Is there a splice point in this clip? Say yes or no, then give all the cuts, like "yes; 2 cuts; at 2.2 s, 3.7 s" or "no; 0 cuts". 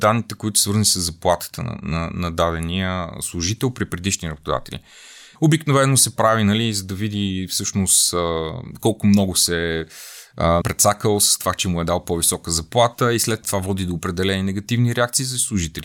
yes; 3 cuts; at 5.4 s, 10.6 s, 13.4 s